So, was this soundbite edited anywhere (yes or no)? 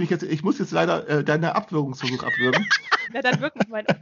yes